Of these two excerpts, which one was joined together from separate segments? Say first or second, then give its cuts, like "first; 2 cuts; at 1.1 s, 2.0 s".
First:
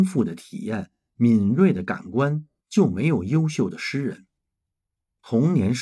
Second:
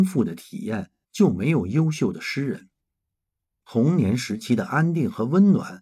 second; 1 cut; at 1.0 s